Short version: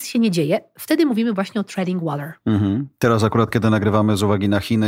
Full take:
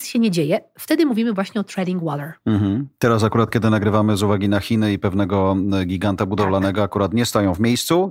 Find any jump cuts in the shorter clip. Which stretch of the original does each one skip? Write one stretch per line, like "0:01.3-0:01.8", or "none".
none